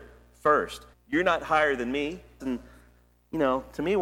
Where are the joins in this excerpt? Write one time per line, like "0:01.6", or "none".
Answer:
0:00.9
0:02.4